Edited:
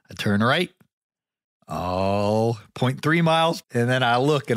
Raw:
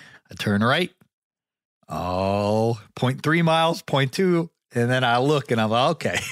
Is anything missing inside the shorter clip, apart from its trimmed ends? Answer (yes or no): yes